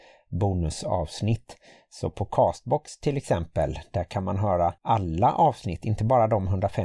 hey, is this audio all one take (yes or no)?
no